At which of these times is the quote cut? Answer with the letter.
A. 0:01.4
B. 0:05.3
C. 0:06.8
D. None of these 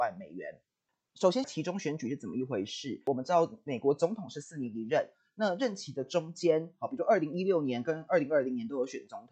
A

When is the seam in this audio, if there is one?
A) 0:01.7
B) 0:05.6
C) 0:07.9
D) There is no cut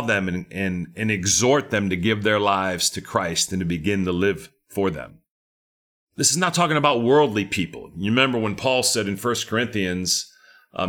D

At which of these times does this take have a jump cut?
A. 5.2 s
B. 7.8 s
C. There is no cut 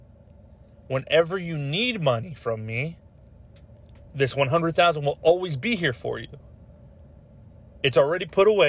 C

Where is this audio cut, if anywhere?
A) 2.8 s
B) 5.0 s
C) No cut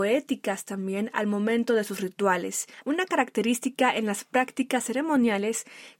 A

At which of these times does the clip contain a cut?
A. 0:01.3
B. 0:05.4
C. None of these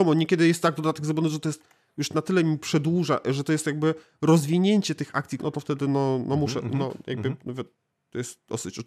B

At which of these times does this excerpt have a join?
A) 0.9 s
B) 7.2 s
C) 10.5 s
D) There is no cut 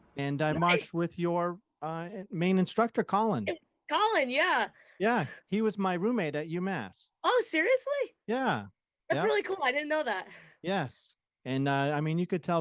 B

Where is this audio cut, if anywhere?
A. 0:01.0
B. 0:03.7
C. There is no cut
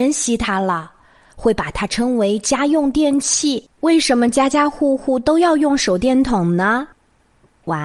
B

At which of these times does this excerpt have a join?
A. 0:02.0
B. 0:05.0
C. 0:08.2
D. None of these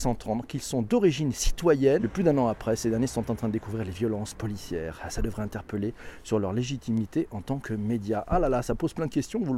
A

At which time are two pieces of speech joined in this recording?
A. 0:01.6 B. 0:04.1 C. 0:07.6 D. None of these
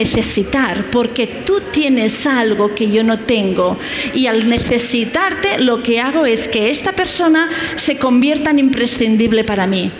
D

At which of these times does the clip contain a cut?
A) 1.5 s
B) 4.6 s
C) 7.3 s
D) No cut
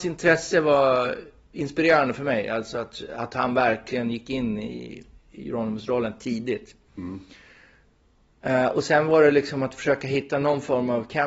A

